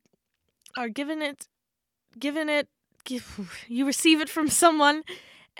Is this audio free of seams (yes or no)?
yes